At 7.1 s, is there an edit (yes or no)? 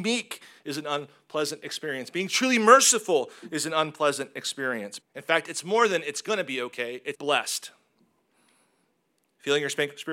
yes